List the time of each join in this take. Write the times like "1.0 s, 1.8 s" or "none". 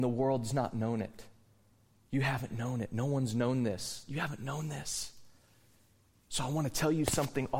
none